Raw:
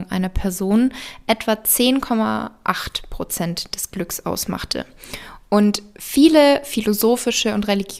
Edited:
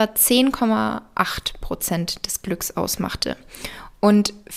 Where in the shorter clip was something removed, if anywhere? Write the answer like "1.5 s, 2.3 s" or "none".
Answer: none